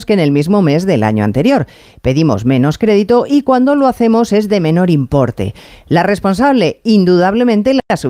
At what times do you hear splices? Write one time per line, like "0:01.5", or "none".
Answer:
none

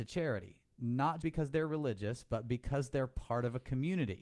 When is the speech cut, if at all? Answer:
0:01.2

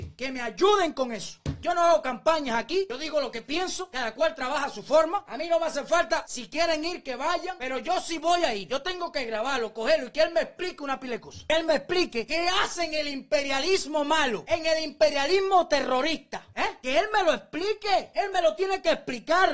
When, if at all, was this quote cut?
none

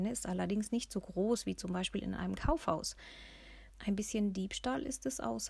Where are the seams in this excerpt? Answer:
0:03.7

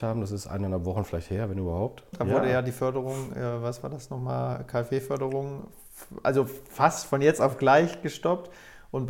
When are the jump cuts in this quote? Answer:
0:02.1

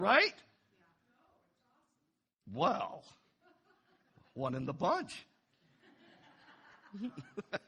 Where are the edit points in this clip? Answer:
none

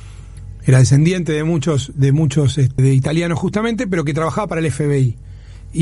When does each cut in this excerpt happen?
0:02.8

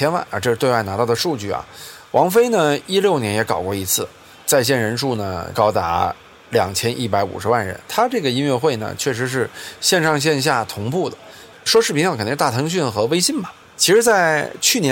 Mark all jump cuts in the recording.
0:11.5
0:13.6

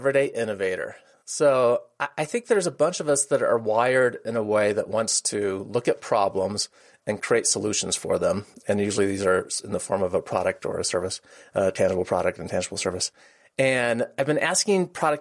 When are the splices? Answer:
none

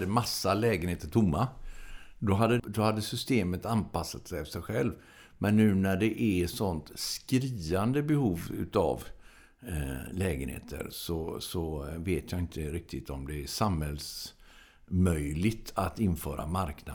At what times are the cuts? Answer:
0:02.6

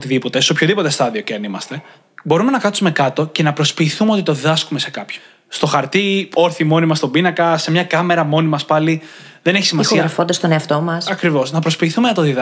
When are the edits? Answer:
none

